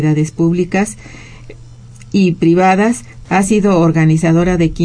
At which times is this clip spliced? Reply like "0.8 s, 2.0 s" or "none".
3.3 s